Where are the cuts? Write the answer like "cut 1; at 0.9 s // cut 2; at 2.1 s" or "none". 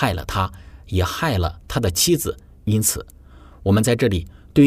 cut 1; at 2.6 s